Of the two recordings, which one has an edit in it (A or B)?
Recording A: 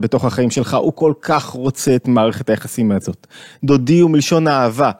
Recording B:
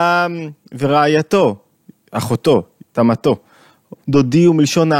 B